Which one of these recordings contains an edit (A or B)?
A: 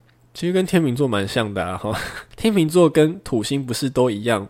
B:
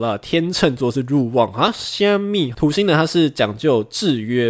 B